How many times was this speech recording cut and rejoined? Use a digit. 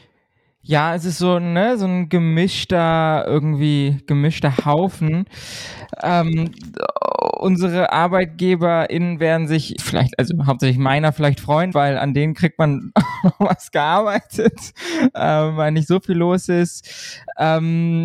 2